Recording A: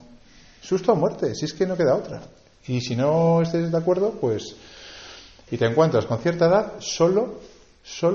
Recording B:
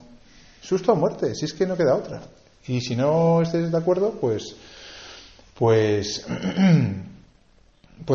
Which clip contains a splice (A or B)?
A